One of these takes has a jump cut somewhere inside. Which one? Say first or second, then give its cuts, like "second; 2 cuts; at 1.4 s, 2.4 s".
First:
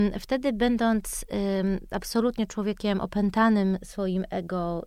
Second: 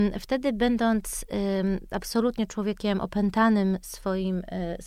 first; 1 cut; at 3.8 s